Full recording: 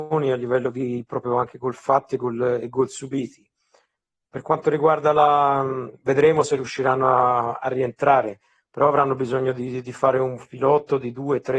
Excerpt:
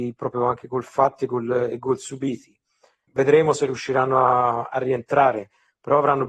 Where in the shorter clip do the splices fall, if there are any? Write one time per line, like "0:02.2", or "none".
0:03.1